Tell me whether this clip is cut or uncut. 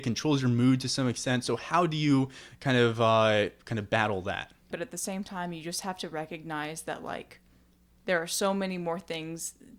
cut